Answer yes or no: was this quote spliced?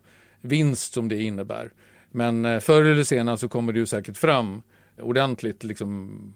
yes